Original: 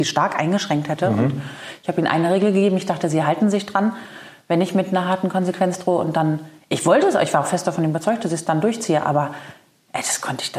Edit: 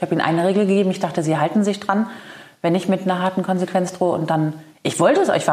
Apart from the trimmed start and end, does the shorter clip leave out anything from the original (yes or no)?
no